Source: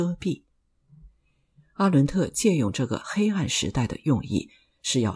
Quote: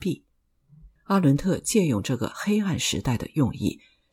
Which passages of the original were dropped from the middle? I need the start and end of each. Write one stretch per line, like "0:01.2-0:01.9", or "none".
0:01.2-0:01.7